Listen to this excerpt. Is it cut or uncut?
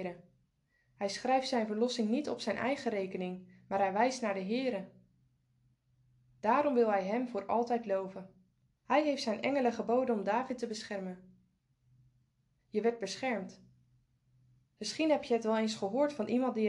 cut